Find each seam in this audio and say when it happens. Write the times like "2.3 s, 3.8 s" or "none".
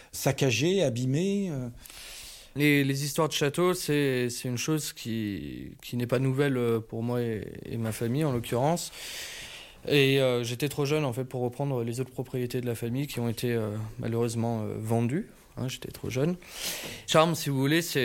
none